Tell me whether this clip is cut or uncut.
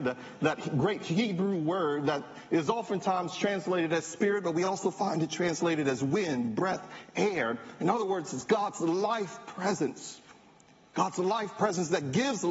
uncut